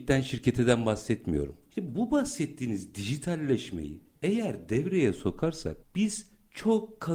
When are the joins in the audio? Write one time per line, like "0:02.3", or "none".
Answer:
0:01.7